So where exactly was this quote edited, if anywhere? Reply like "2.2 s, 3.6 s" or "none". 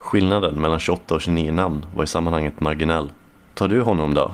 3.4 s